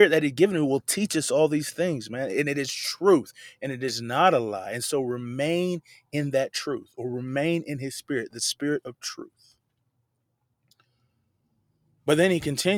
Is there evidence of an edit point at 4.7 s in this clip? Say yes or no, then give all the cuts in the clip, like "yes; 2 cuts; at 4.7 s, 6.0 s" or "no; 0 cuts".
no; 0 cuts